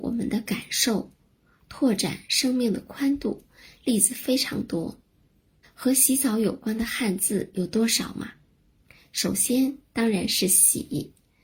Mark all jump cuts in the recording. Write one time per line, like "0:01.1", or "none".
0:05.6